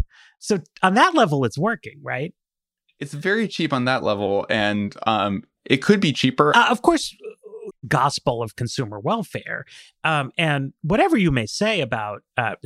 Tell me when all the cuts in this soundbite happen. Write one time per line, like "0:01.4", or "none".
0:06.5
0:07.7